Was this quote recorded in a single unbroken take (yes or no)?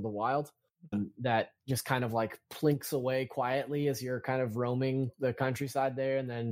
no